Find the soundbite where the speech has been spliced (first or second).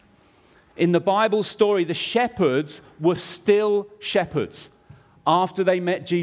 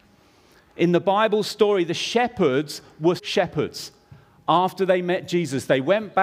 second